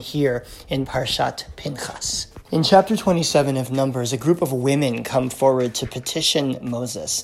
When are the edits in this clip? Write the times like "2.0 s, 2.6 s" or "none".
2.4 s